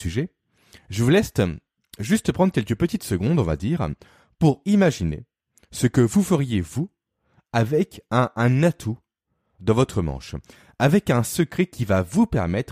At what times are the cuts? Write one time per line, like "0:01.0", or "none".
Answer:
none